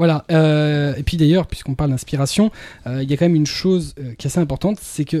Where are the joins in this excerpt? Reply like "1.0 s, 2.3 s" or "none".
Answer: none